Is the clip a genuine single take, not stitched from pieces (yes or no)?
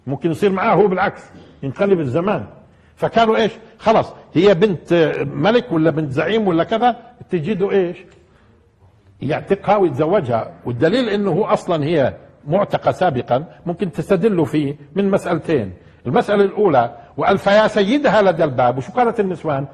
yes